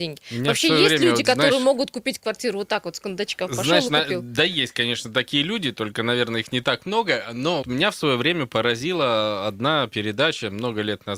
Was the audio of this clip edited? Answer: yes; 1 cut; at 7.6 s

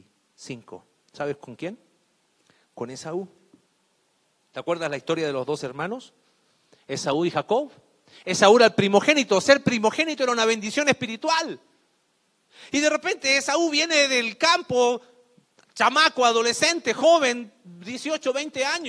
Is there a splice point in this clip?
no; 0 cuts

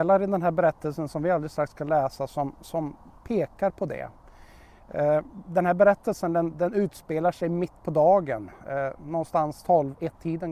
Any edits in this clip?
yes; 2 cuts; at 6.5 s, 9.0 s

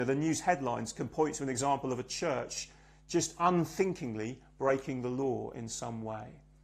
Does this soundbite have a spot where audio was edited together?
no; 0 cuts

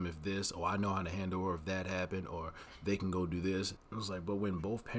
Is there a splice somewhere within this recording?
yes; 1 cut; at 3.8 s

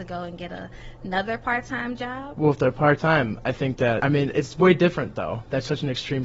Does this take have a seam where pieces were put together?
no; 0 cuts

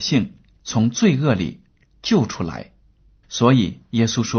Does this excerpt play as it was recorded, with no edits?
no; 1 cut; at 3.2 s

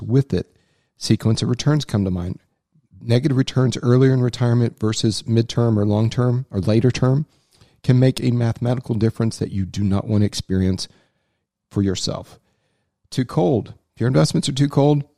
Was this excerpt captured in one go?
yes; 0 cuts

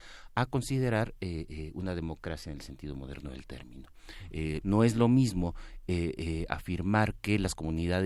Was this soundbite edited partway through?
yes; 1 cut; at 4.6 s

